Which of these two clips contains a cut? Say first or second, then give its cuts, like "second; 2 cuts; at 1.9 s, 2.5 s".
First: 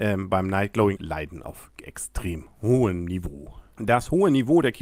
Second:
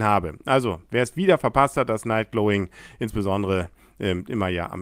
first; 1 cut; at 1.0 s